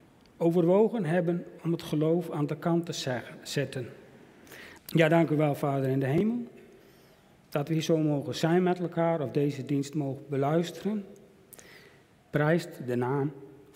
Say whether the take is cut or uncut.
cut